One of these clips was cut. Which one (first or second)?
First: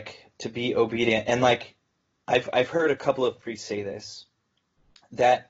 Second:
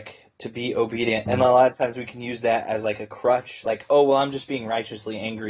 second